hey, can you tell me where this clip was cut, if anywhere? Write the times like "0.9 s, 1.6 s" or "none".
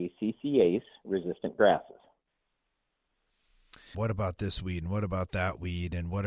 3.9 s